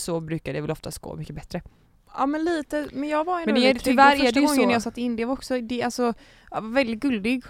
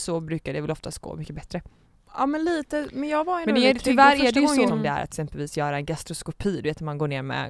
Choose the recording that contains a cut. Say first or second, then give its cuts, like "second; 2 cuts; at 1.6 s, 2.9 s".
second; 1 cut; at 4.7 s